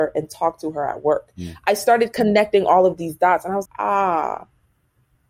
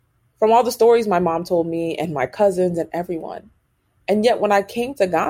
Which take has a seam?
first; 1 cut; at 3.7 s

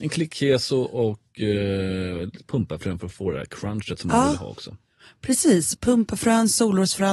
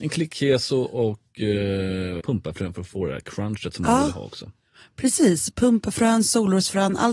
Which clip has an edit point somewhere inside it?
second; 1 cut; at 2.2 s

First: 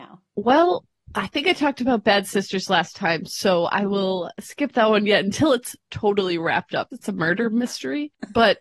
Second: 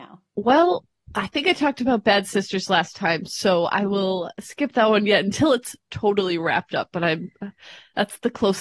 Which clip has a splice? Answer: first; 1 cut; at 6.9 s

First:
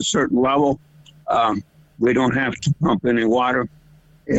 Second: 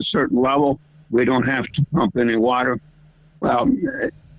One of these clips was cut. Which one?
second; 2 cuts; at 1.0 s, 3.3 s

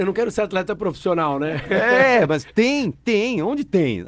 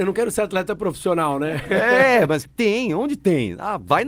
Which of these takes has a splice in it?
second; 1 cut; at 2.4 s

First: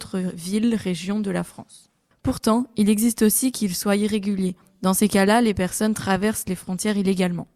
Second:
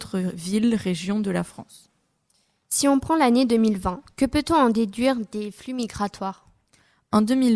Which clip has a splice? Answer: first; 1 cut; at 2.1 s

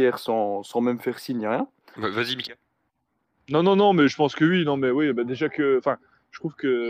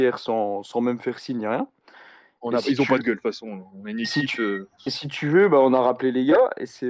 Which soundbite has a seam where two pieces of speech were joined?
first; 1 cut; at 1.9 s

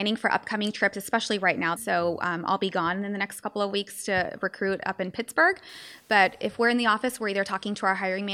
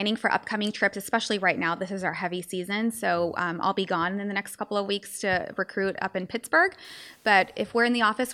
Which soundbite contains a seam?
first; 1 cut; at 1.8 s

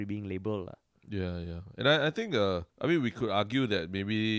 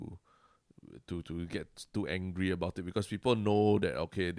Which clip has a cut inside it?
first; 1 cut; at 2.7 s

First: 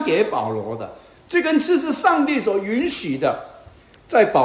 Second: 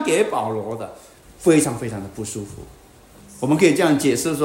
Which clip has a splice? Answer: second; 2 cuts; at 1.2 s, 3.2 s

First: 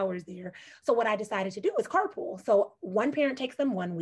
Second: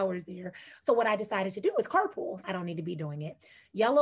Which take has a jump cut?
second; 1 cut; at 2.4 s

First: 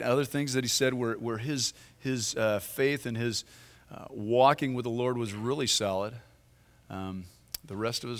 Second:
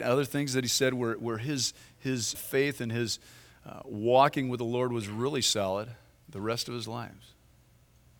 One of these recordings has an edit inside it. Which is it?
second; 2 cuts; at 2.3 s, 6.2 s

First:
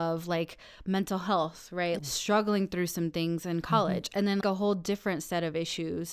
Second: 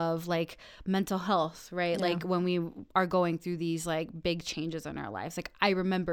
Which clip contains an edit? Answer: first; 2 cuts; at 2.0 s, 4.4 s

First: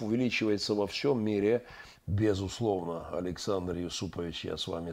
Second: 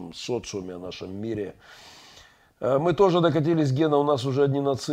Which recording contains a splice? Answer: first; 1 cut; at 1.9 s

